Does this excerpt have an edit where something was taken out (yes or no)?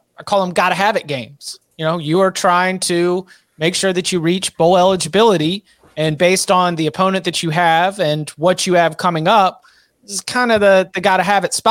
no